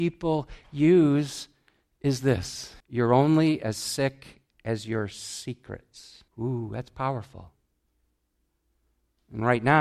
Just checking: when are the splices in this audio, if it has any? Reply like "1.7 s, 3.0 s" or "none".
2.8 s, 6.3 s